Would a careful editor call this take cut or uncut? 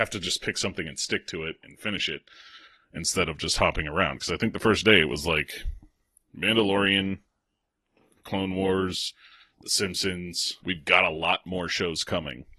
cut